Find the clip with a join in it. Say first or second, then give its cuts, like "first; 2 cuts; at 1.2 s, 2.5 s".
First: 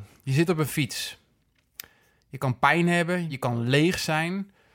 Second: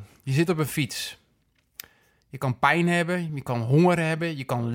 first; 1 cut; at 3.3 s